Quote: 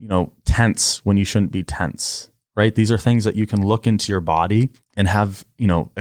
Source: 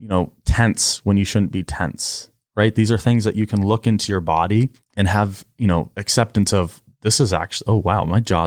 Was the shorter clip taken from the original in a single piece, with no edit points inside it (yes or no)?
yes